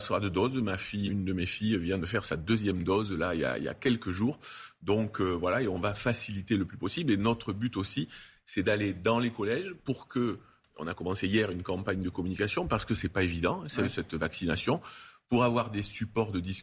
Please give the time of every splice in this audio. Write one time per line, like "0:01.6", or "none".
0:01.1